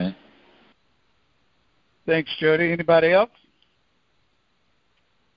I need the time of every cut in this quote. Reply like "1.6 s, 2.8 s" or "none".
none